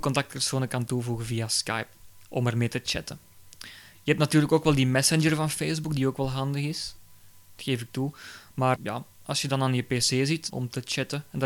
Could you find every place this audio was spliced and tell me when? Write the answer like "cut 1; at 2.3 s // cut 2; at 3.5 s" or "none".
cut 1; at 8.8 s // cut 2; at 10.5 s